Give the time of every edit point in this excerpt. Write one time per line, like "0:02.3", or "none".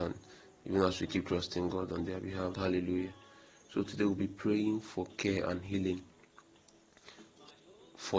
0:02.5